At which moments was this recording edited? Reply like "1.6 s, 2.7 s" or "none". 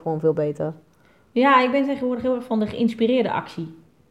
none